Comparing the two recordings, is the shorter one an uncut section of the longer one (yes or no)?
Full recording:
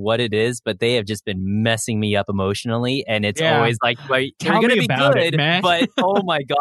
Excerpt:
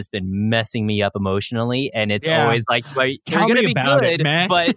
yes